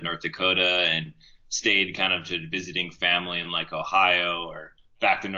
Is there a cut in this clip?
no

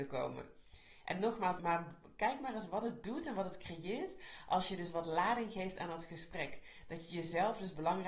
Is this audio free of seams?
no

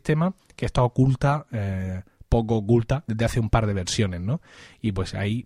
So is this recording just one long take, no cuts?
no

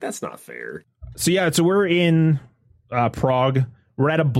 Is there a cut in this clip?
no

